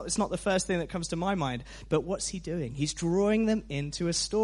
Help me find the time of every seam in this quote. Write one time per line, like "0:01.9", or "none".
none